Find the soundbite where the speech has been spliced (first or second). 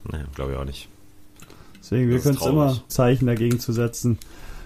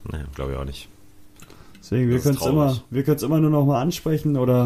first